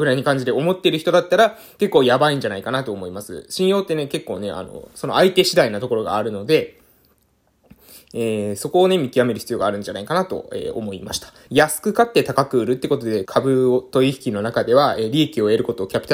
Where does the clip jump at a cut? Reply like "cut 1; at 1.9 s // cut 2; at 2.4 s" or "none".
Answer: cut 1; at 11.5 s // cut 2; at 13.3 s